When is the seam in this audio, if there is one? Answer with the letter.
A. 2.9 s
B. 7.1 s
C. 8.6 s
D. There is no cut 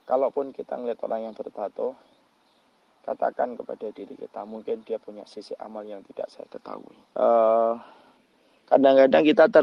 B